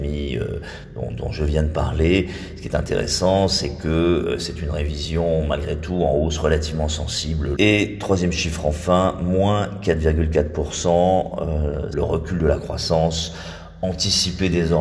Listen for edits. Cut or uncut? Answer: cut